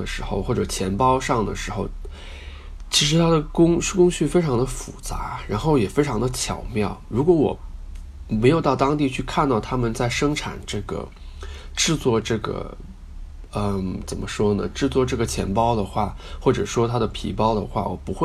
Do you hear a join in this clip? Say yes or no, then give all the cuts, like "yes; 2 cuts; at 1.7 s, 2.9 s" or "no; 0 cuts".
no; 0 cuts